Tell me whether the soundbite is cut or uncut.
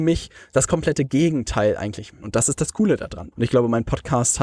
cut